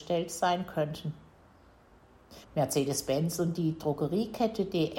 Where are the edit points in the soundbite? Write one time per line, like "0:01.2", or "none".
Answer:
0:02.4